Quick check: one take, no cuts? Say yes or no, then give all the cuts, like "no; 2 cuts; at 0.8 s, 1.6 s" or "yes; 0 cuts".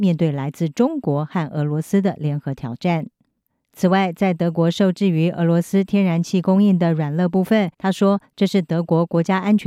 no; 1 cut; at 7.7 s